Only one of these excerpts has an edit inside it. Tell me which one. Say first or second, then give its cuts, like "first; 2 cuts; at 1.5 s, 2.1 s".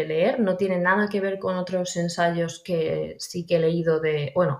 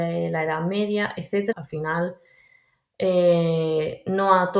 second; 1 cut; at 1.5 s